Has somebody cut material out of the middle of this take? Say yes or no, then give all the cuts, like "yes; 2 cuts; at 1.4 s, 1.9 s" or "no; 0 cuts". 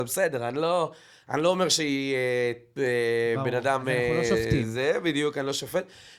no; 0 cuts